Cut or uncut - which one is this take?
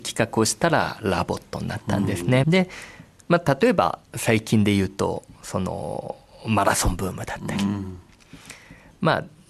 cut